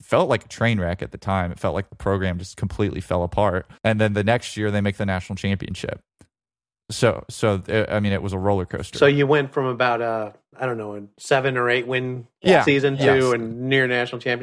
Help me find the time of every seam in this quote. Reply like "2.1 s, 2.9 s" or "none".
3.8 s, 12.3 s